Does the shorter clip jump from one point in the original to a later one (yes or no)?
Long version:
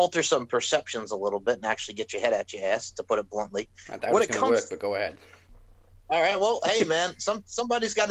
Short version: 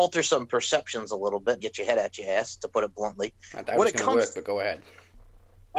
yes